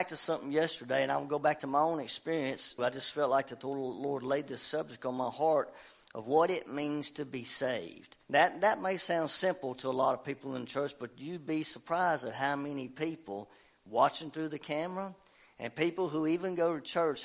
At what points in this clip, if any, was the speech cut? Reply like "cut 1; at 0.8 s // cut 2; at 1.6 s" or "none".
cut 1; at 2.8 s // cut 2; at 8.2 s